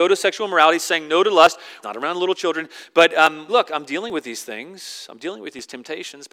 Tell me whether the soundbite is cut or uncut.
cut